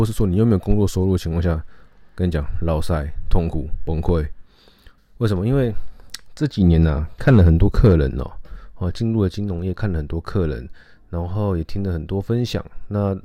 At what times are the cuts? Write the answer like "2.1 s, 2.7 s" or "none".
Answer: 5.0 s